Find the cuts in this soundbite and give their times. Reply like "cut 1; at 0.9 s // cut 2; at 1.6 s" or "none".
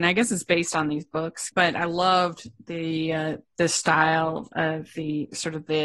cut 1; at 1.5 s